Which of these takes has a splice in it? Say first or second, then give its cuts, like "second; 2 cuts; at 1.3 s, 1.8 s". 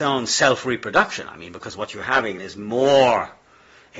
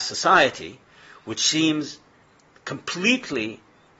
first; 1 cut; at 2.4 s